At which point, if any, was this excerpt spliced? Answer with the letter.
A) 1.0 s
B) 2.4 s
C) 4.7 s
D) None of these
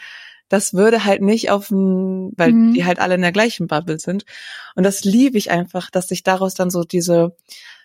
B